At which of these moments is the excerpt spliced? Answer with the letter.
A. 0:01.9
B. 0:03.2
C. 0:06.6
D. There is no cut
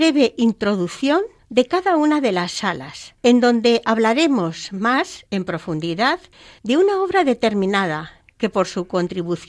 B